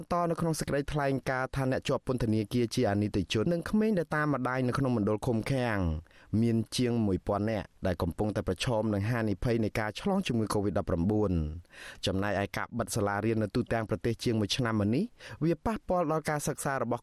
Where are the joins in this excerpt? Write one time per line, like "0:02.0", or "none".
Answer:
0:03.4
0:07.8